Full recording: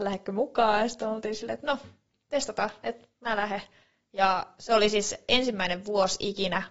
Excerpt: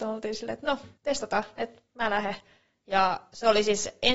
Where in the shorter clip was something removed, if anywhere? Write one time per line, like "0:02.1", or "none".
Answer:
0:01.0